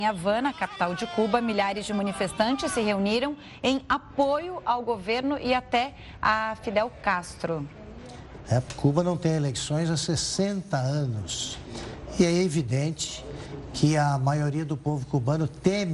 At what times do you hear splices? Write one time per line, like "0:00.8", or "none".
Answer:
0:08.4

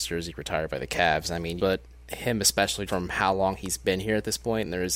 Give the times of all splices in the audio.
0:01.6
0:02.9

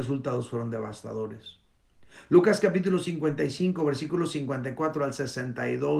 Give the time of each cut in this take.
none

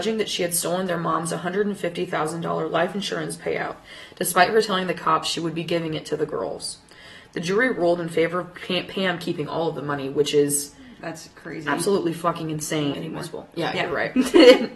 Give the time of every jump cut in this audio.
0:12.9

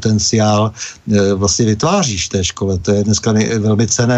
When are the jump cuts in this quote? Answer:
none

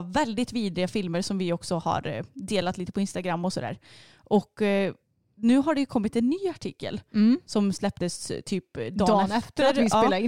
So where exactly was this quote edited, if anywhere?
none

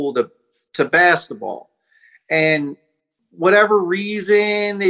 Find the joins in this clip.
none

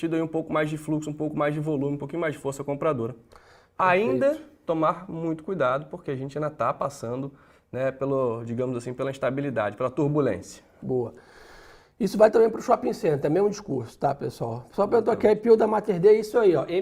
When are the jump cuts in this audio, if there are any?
none

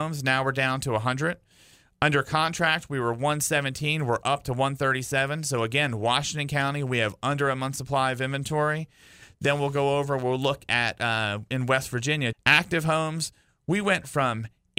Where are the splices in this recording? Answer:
0:09.4
0:12.3

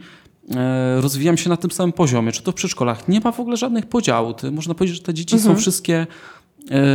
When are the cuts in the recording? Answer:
none

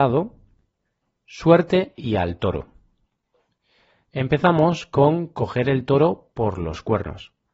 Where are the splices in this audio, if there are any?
none

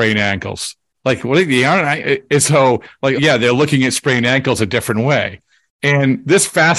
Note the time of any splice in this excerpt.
0:00.9
0:03.2

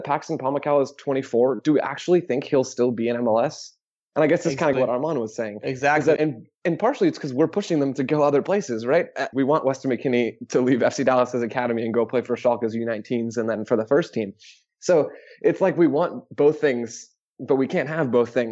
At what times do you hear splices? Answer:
0:04.7
0:06.2
0:09.3

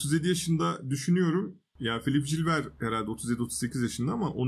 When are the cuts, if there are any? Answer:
none

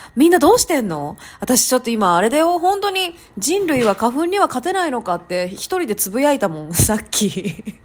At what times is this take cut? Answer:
none

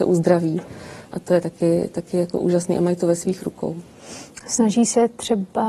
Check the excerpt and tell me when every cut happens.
none

